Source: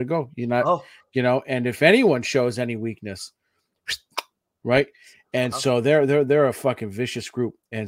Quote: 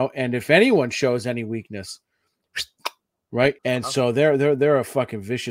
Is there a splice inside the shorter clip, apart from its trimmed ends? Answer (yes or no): yes